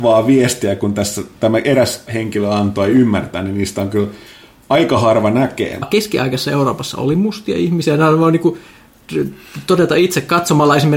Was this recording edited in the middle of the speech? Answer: yes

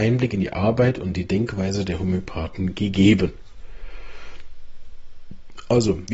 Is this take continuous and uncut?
yes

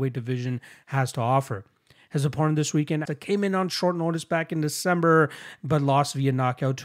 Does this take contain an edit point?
yes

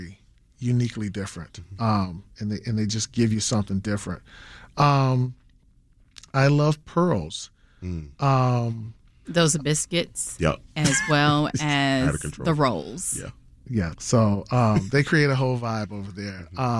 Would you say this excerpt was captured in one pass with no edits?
no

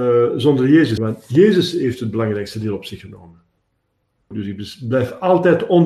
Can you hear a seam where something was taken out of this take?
yes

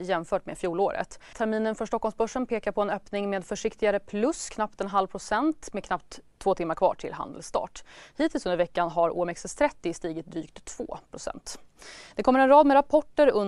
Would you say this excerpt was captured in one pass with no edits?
no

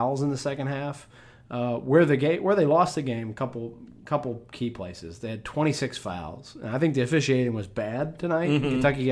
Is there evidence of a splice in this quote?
no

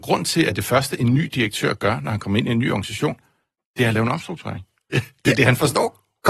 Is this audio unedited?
no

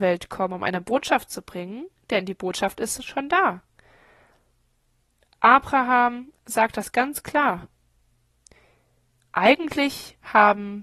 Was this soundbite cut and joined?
no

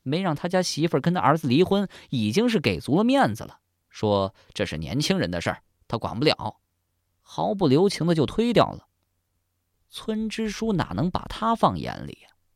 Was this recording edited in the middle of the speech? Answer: yes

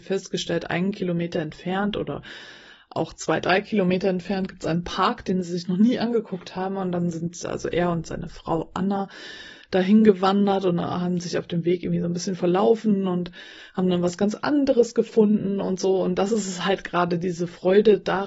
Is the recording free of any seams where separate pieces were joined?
yes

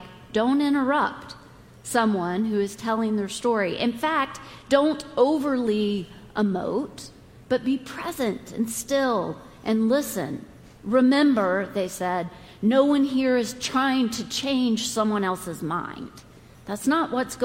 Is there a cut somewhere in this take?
no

